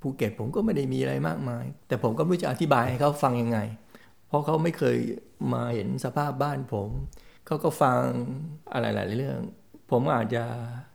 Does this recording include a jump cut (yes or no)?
yes